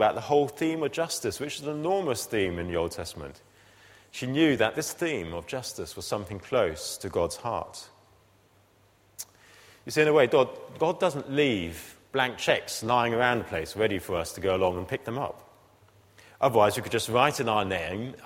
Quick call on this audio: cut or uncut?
uncut